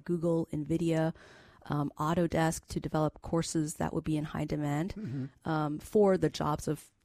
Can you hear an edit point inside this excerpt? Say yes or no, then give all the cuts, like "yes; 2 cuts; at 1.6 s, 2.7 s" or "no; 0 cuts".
no; 0 cuts